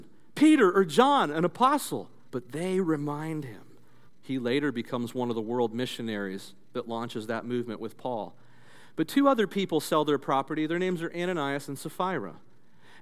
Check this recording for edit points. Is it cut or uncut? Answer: cut